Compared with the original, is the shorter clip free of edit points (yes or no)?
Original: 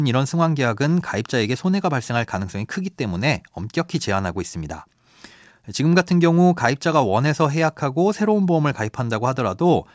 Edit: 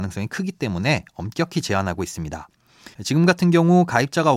no